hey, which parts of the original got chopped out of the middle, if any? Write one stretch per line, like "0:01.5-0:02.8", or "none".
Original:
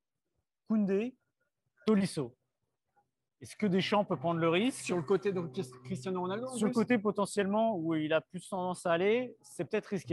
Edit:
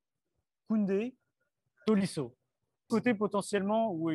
0:02.9-0:06.7